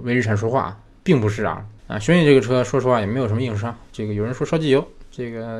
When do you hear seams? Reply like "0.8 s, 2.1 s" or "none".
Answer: 1.8 s